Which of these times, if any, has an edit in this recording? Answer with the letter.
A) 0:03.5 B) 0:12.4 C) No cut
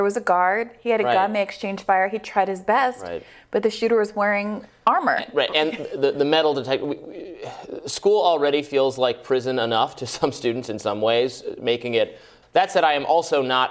B